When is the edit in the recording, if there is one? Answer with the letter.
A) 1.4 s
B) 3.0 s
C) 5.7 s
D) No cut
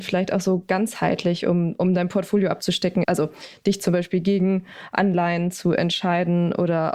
B